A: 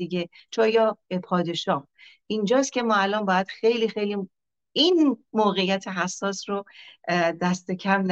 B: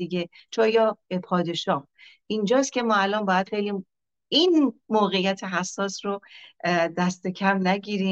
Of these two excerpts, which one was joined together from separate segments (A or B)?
B